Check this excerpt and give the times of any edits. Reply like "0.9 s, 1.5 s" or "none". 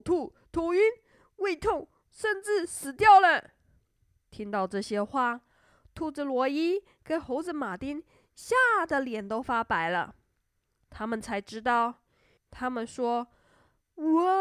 12.4 s